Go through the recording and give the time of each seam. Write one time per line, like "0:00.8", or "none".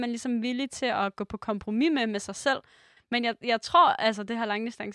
0:03.0